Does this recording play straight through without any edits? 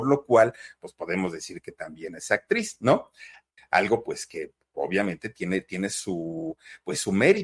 no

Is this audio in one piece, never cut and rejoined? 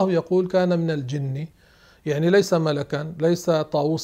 yes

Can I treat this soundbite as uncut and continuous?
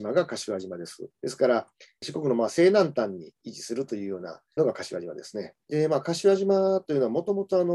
no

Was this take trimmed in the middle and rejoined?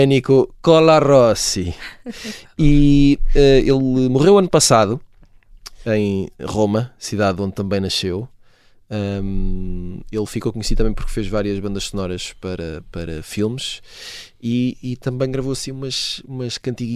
no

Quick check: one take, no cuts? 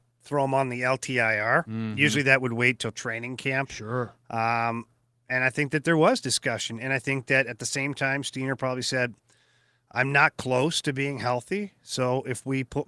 yes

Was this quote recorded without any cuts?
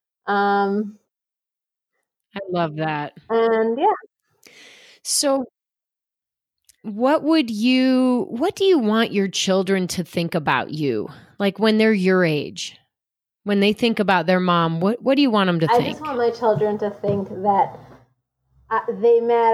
yes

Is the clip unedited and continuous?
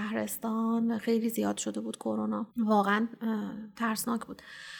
no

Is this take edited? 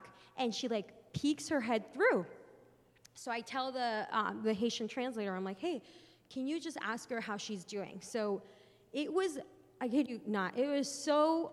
no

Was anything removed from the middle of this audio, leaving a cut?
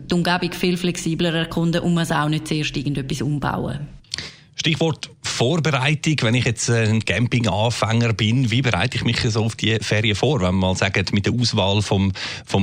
no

